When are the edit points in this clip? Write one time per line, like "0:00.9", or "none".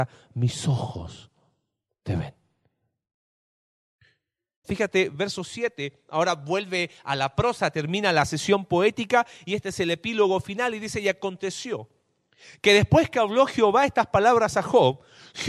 0:04.6